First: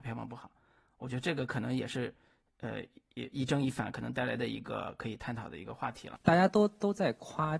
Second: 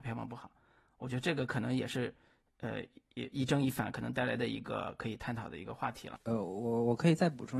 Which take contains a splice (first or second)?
first